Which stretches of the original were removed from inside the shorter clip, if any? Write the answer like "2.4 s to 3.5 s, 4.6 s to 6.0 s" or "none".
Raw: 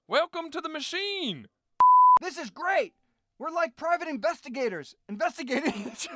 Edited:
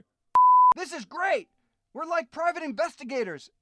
none